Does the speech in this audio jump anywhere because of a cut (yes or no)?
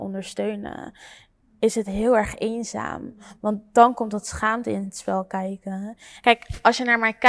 yes